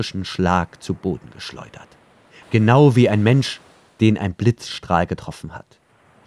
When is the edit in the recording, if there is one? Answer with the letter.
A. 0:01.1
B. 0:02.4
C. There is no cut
B